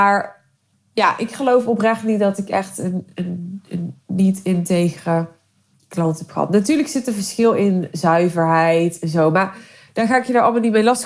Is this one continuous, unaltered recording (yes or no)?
yes